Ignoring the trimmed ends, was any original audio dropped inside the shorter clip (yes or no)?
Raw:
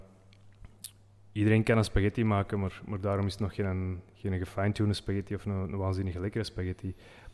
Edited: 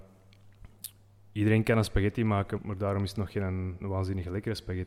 yes